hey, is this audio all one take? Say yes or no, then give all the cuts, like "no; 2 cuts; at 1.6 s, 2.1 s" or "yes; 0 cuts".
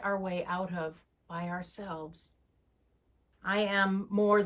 no; 1 cut; at 3.3 s